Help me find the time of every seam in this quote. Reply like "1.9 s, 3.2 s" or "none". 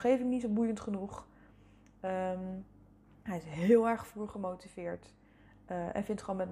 none